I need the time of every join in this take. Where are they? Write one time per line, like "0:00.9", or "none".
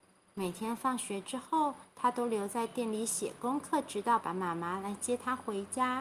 0:04.2